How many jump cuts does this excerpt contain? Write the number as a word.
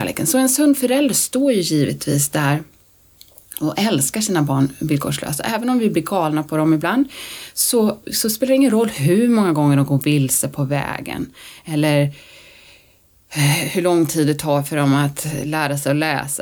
one